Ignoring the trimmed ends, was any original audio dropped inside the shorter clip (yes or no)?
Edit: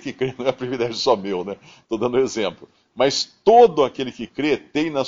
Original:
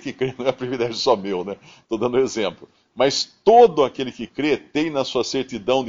no